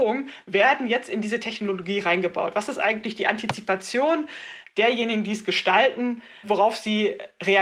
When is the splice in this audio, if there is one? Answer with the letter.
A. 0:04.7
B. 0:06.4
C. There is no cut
B